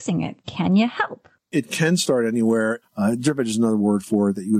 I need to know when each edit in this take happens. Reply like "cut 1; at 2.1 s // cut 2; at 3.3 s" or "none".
cut 1; at 2.8 s

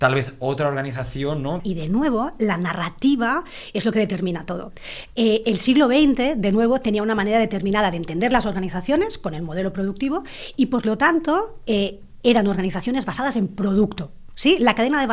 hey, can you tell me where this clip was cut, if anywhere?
cut 1; at 1.6 s

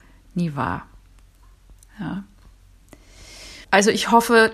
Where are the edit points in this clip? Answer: cut 1; at 3.6 s

